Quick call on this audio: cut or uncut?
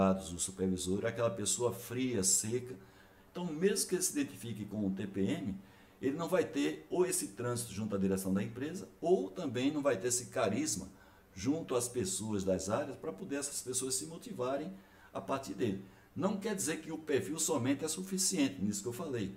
uncut